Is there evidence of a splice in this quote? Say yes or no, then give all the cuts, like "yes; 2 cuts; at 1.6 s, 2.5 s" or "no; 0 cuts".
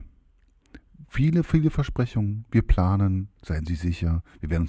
no; 0 cuts